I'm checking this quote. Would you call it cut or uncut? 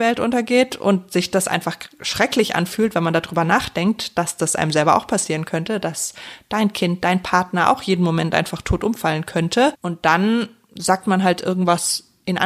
cut